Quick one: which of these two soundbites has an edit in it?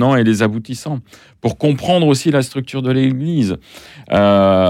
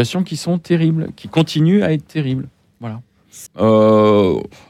second; 1 cut; at 3.5 s

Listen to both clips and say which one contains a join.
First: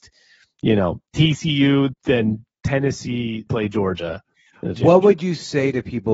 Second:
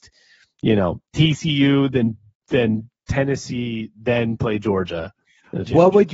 first; 2 cuts; at 1.9 s, 3.5 s

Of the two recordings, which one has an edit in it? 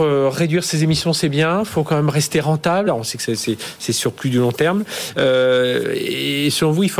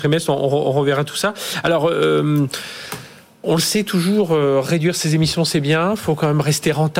first; 1 cut; at 2.9 s

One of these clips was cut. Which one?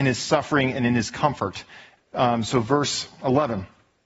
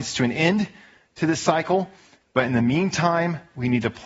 first; 1 cut; at 2.0 s

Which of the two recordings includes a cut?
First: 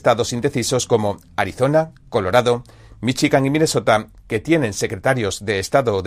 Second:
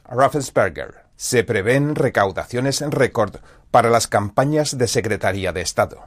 second; 1 cut; at 1.1 s

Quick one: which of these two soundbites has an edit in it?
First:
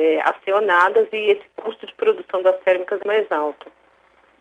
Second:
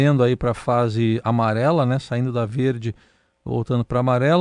first; 1 cut; at 3.0 s

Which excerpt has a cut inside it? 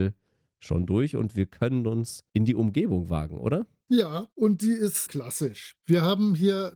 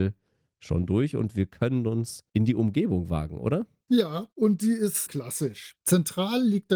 second; 1 cut; at 5.8 s

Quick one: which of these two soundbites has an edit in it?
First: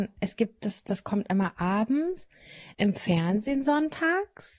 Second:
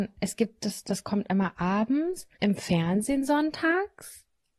second; 1 cut; at 2.3 s

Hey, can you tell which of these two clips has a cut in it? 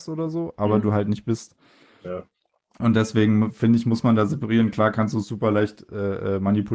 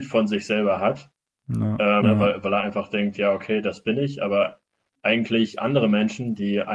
second; 1 cut; at 2.0 s

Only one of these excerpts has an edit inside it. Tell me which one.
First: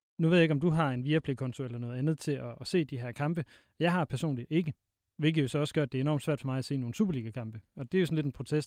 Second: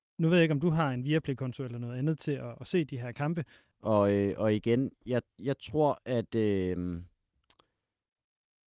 second; 1 cut; at 3.7 s

